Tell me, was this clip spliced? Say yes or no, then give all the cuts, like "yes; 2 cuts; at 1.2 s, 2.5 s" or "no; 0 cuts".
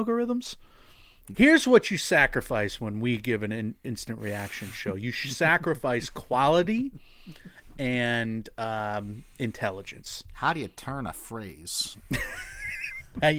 yes; 1 cut; at 1.3 s